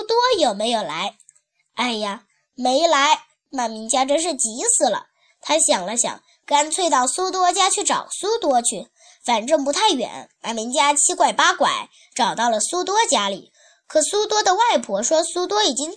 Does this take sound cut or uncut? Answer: cut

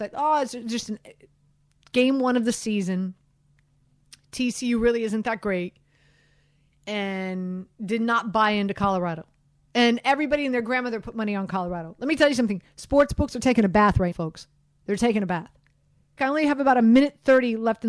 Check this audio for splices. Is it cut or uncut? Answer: cut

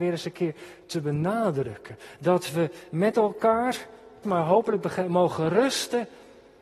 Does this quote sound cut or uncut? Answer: cut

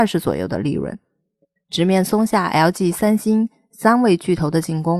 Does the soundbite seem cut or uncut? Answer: cut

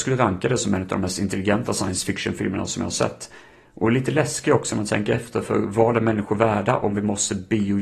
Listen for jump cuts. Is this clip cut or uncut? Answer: uncut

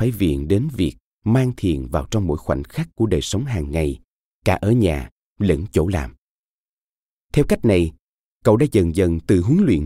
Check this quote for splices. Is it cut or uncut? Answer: uncut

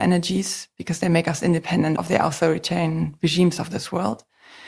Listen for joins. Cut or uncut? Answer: cut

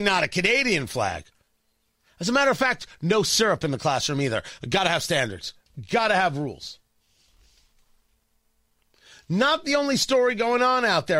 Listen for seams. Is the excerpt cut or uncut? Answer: uncut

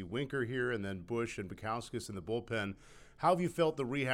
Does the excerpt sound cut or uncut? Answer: uncut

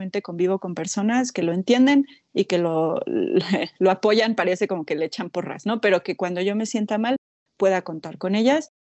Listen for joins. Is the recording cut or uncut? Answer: uncut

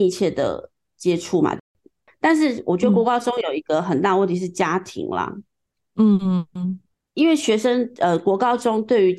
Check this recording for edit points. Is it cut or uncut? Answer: uncut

